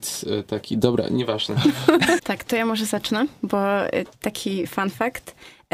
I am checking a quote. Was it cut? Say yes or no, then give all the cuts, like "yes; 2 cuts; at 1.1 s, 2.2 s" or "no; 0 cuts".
yes; 1 cut; at 2.2 s